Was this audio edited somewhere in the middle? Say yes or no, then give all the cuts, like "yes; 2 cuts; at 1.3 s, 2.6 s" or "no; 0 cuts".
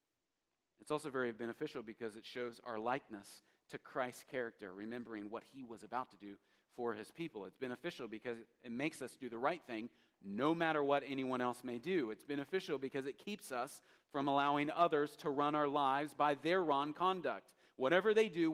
no; 0 cuts